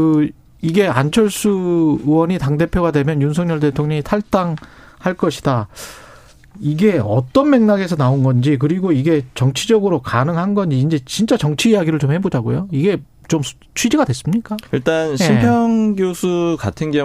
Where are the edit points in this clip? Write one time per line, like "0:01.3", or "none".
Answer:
0:14.7